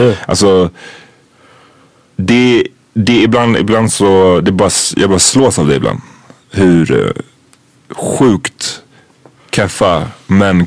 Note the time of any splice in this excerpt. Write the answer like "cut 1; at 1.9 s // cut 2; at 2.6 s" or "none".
none